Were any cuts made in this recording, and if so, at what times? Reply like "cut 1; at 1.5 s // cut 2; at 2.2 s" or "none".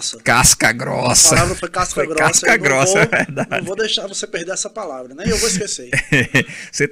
none